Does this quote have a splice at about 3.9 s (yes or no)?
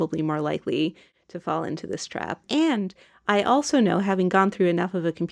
no